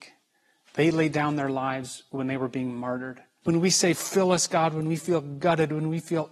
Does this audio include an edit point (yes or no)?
yes